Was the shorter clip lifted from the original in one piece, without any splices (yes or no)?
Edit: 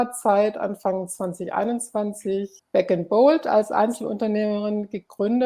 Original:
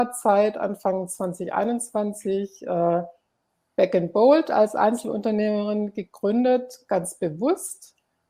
no